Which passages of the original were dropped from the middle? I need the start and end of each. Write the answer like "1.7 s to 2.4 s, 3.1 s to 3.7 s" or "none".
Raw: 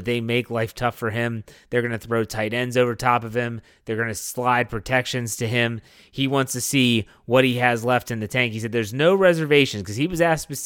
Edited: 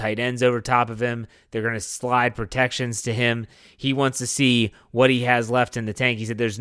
none